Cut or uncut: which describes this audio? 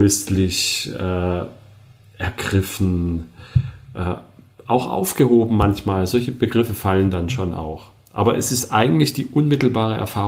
uncut